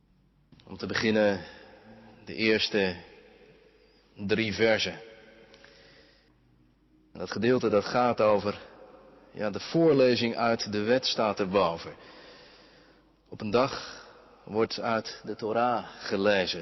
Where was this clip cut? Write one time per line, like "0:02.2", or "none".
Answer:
none